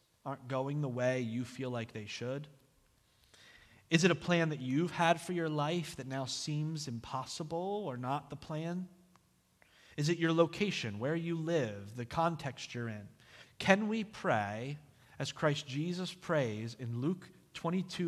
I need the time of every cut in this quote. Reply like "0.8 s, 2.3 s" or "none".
13.5 s